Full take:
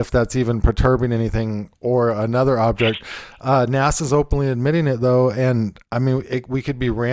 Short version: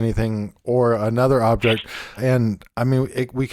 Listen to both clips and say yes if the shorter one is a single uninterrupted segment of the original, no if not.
no